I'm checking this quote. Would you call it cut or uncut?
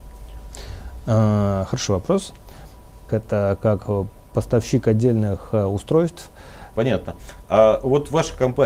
cut